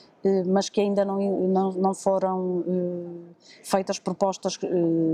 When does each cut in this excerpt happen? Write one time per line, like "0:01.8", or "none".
none